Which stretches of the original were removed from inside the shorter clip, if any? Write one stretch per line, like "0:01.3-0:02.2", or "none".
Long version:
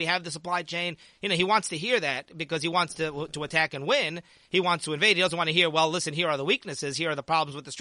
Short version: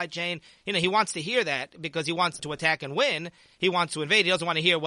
0:03.0-0:03.3